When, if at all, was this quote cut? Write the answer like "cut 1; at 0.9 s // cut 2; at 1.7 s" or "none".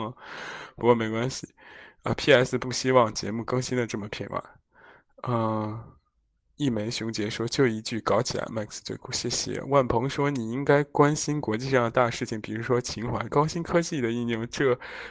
cut 1; at 13.3 s